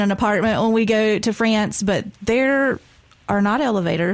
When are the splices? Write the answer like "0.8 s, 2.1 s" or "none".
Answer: none